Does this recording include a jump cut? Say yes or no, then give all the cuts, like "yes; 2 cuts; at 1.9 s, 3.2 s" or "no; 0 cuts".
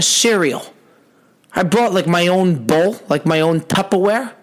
no; 0 cuts